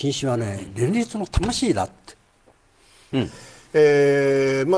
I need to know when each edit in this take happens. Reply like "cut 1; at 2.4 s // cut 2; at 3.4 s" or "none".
cut 1; at 3.1 s